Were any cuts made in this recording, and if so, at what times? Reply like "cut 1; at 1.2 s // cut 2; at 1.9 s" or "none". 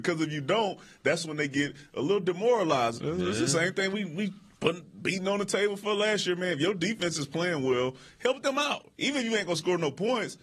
cut 1; at 3.0 s